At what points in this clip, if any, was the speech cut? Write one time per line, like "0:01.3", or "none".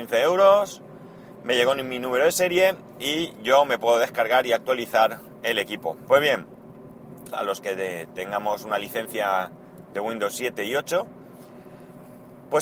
0:06.1
0:07.3

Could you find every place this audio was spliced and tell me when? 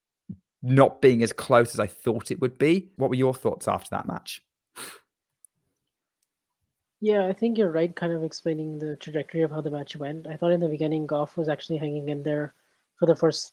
0:03.0

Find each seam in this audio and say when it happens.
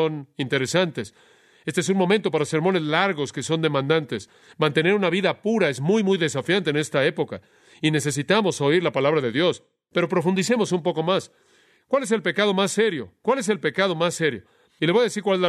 none

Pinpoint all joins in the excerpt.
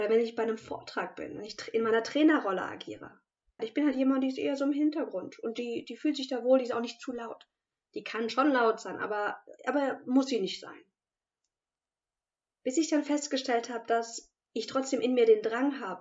0:03.6

